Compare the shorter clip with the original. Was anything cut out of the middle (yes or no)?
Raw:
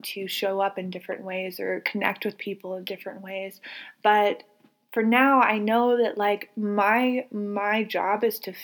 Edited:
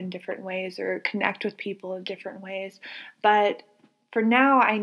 no